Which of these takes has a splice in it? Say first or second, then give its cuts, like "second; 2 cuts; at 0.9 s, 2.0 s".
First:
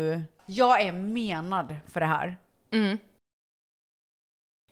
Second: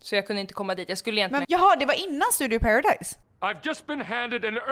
second; 2 cuts; at 1.4 s, 3.2 s